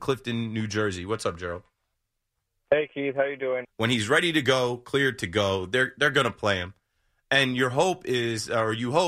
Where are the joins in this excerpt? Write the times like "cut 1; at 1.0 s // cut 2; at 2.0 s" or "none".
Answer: cut 1; at 3.6 s

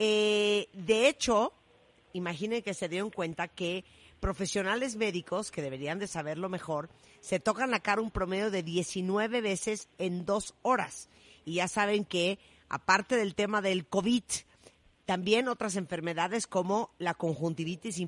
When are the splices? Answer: none

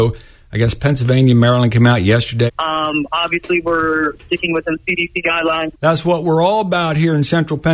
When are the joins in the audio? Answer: cut 1; at 2.5 s // cut 2; at 5.7 s

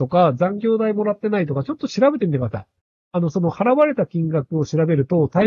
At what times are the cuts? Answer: none

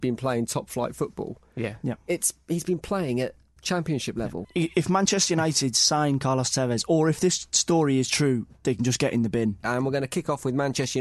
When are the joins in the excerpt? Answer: cut 1; at 4.4 s // cut 2; at 9.6 s

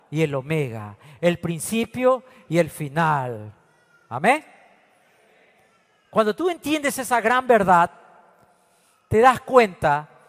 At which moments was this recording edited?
none

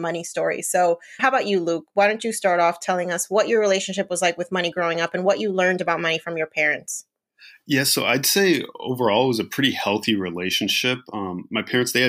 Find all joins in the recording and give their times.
cut 1; at 1.2 s

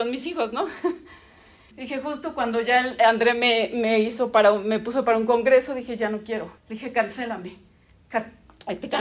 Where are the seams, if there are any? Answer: cut 1; at 1.7 s // cut 2; at 6.6 s

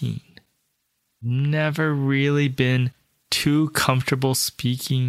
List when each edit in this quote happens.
cut 1; at 1.1 s

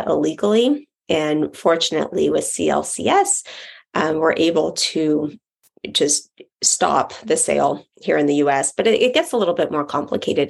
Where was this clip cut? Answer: none

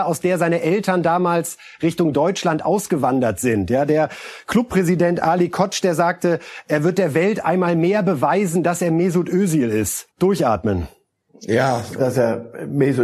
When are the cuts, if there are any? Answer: cut 1; at 10.1 s // cut 2; at 12.0 s

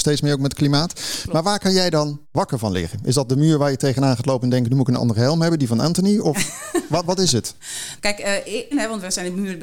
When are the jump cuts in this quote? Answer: cut 1; at 8.7 s

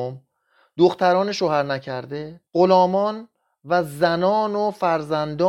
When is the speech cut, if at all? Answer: cut 1; at 2.5 s

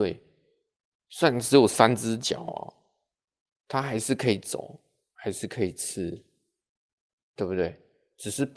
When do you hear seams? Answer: none

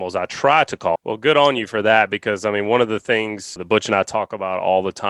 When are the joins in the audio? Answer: cut 1; at 1.0 s

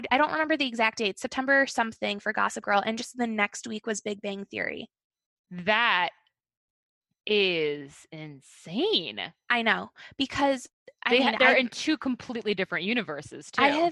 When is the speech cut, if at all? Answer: none

